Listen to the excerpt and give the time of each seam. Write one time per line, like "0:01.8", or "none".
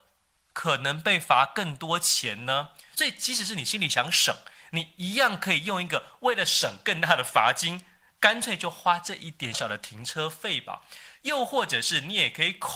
0:09.5
0:11.2